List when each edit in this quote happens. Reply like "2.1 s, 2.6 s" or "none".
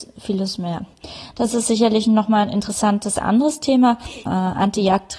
1.3 s, 4.3 s

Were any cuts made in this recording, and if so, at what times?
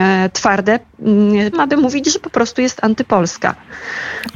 1.5 s

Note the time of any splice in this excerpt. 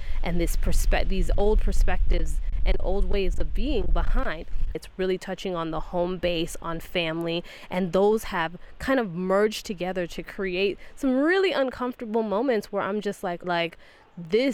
4.7 s, 13.4 s

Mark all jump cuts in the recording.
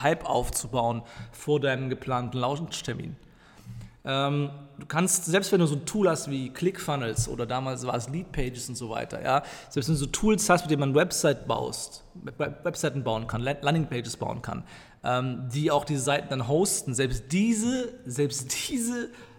none

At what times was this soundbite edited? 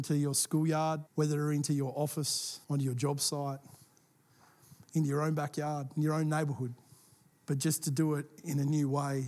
1.1 s, 2.6 s, 7.3 s

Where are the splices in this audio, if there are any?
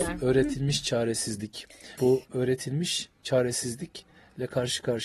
2.0 s

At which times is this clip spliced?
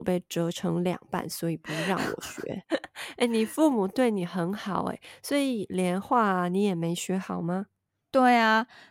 2.7 s, 6.0 s

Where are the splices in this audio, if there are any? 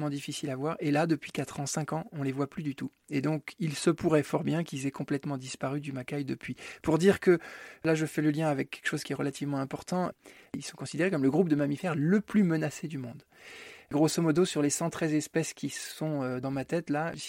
none

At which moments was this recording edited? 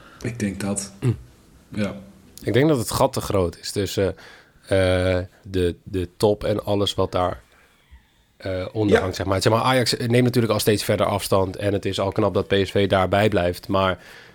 5.4 s

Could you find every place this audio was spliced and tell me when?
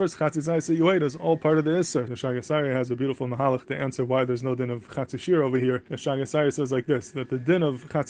2.1 s, 5.9 s

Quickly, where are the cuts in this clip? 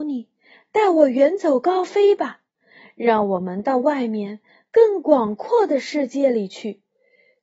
none

